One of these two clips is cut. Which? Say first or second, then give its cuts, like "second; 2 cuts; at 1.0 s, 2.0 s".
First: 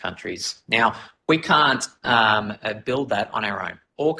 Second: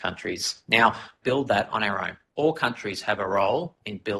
second; 1 cut; at 1.2 s